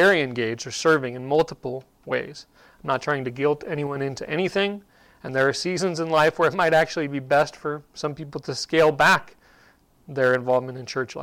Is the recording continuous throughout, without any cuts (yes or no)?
yes